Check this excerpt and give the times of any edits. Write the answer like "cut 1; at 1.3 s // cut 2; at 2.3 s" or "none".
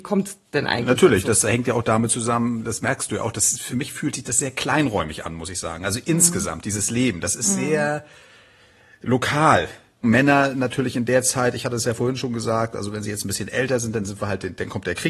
cut 1; at 3.7 s // cut 2; at 10.0 s